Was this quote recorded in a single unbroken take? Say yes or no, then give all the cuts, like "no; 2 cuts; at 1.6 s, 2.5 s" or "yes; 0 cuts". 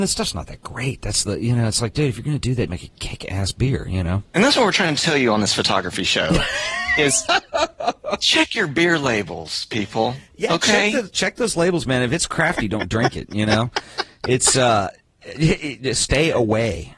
no; 1 cut; at 2.7 s